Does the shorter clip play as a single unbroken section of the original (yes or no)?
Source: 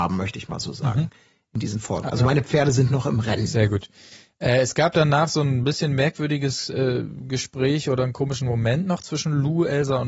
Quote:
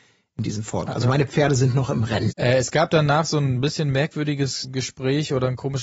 no